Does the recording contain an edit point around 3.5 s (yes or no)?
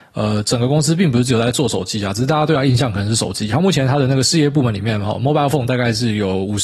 no